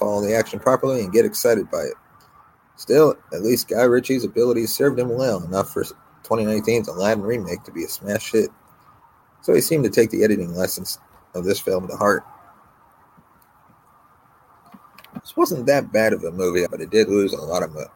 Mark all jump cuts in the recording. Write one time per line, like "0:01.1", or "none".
0:15.2
0:16.7